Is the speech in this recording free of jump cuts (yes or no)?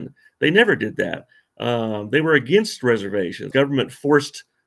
no